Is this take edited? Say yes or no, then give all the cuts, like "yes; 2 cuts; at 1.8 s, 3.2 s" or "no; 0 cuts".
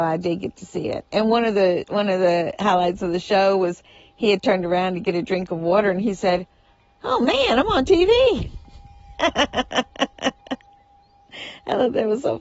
no; 0 cuts